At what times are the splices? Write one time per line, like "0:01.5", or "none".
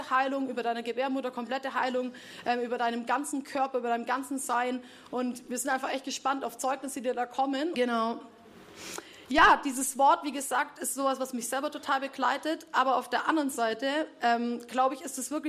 0:07.7

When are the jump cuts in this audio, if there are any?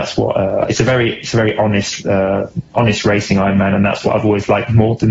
none

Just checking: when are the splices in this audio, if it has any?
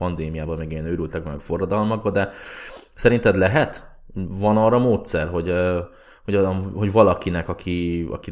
none

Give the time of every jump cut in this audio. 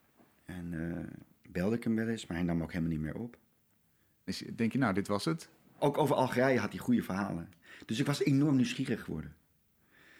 0:04.3
0:05.8

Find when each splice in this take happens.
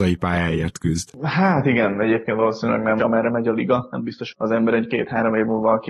0:03.0
0:04.3

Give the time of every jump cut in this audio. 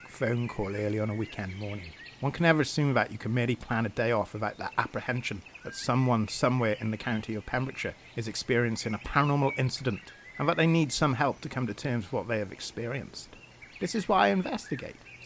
none

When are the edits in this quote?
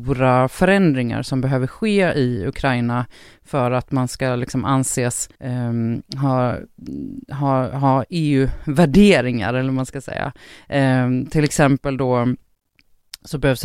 0:05.3

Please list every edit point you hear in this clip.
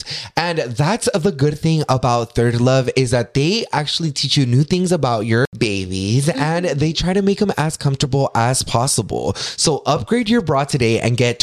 none

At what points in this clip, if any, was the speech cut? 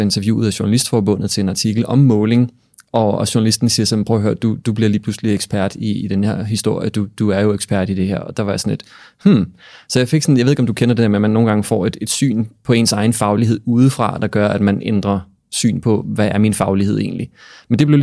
none

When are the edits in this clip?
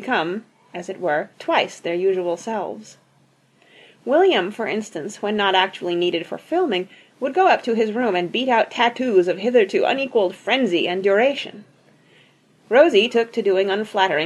0:01.3

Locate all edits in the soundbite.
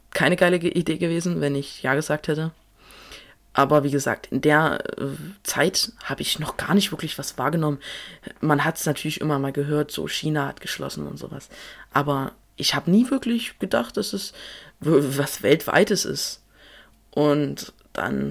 none

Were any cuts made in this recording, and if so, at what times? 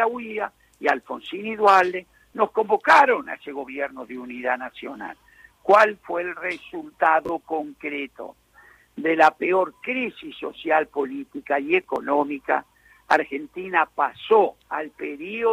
0:14.6

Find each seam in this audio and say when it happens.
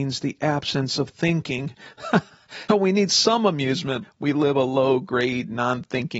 0:02.7
0:04.0

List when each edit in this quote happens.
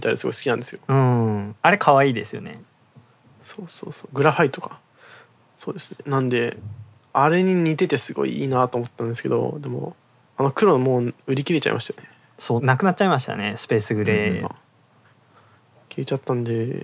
0:12.6
0:14.4

